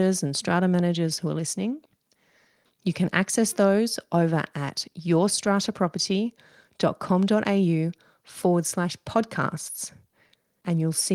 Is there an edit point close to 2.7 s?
yes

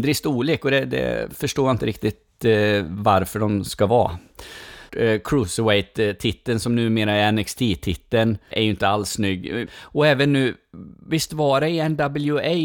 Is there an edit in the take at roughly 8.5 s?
yes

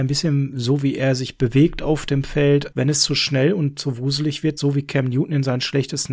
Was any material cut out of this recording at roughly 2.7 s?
yes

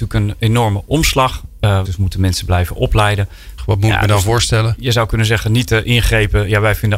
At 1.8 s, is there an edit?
yes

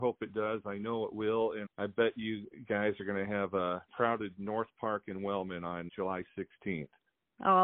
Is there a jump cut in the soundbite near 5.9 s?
yes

